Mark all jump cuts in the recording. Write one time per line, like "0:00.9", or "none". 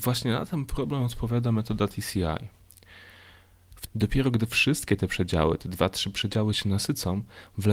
0:03.9